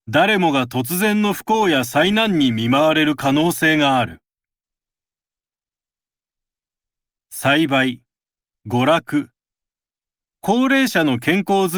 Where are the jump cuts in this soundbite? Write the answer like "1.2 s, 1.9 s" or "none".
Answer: 8.5 s